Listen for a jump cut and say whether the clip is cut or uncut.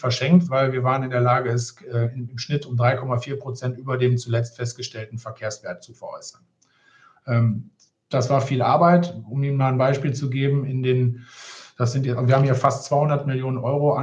uncut